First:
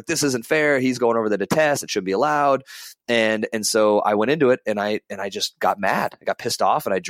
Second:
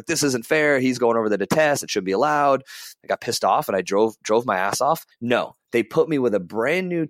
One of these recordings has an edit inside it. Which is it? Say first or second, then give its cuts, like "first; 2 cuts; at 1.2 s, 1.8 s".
second; 2 cuts; at 3.0 s, 5.1 s